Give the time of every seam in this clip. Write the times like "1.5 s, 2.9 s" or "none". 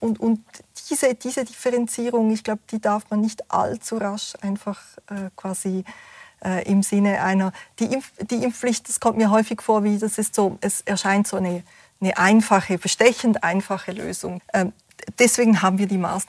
14.4 s